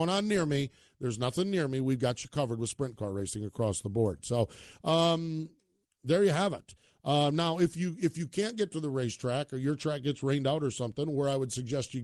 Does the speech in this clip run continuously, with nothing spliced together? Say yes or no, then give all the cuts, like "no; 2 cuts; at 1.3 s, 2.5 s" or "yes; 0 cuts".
yes; 0 cuts